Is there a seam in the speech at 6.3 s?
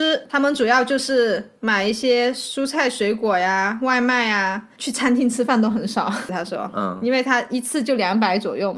yes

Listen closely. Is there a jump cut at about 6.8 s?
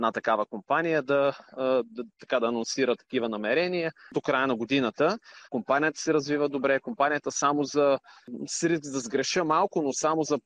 no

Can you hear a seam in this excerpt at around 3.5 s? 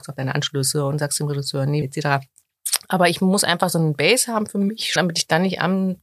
no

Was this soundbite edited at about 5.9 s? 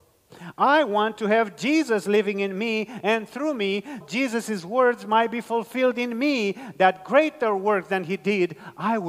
no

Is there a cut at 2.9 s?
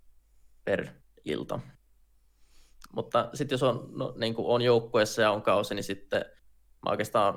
yes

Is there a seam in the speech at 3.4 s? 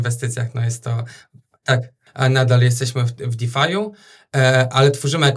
no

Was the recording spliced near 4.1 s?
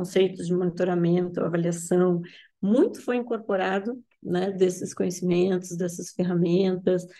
no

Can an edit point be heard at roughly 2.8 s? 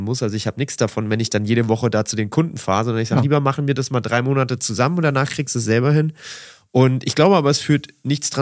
no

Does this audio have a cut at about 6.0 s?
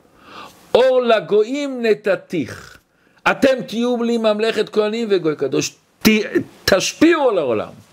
yes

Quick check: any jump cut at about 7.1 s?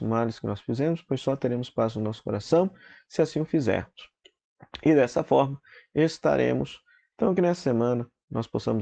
yes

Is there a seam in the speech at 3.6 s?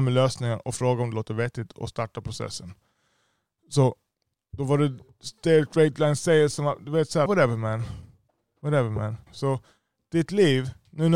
no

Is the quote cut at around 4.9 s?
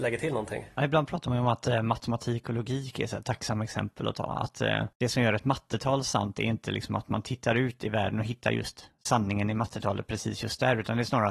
yes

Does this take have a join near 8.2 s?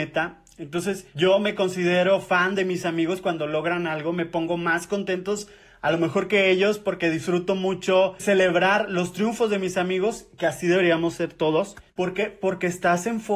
yes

